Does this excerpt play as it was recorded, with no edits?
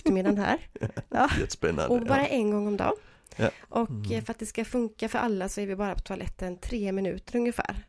yes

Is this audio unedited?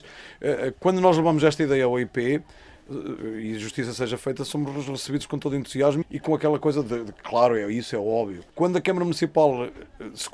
no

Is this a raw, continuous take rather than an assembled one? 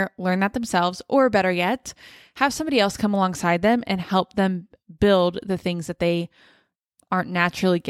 yes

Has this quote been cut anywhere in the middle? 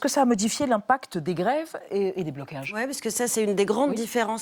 no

